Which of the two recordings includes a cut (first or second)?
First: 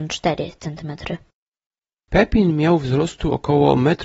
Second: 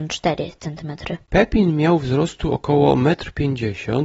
second